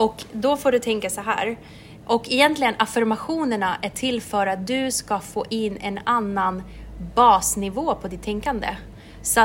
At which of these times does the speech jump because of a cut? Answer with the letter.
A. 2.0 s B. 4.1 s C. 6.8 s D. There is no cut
A